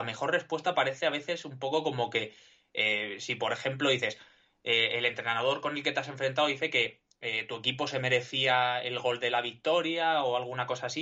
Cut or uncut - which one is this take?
uncut